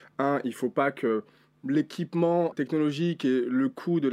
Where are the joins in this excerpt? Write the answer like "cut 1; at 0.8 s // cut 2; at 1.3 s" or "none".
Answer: cut 1; at 2.5 s